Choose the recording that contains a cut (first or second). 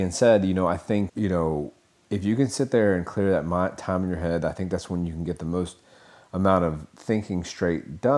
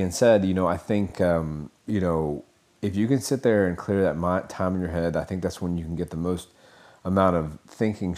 first